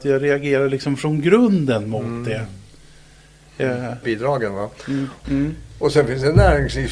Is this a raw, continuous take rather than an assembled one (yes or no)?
no